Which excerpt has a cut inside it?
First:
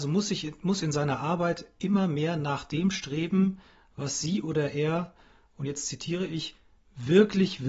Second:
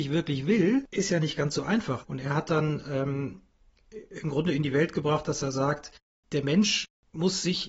second; 1 cut; at 2.0 s

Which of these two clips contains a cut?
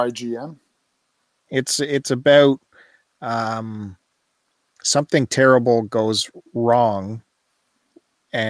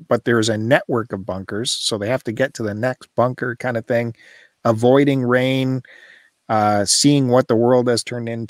first; 1 cut; at 1.5 s

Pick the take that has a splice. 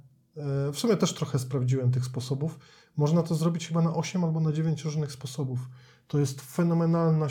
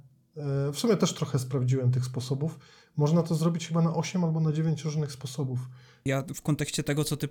second; 1 cut; at 6.1 s

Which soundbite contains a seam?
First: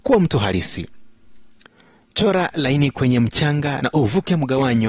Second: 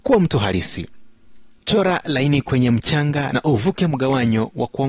second; 1 cut; at 1.6 s

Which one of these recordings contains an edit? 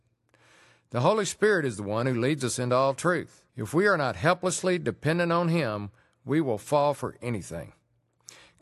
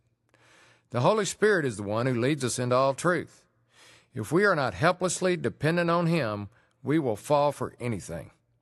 first; 1 cut; at 3.5 s

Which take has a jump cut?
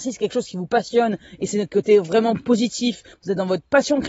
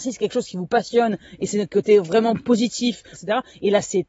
second; 1 cut; at 3.1 s

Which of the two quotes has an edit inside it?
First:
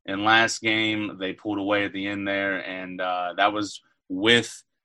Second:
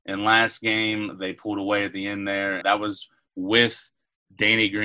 second; 1 cut; at 2.6 s

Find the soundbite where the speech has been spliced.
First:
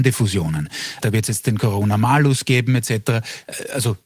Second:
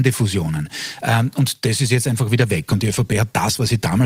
first; 1 cut; at 1.0 s

